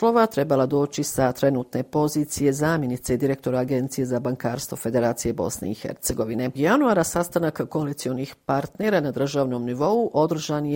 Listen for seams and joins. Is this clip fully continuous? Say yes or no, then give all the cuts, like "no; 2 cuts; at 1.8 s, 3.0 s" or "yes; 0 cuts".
no; 1 cut; at 6.6 s